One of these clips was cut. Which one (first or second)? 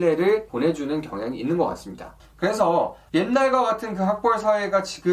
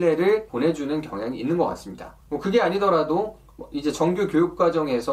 first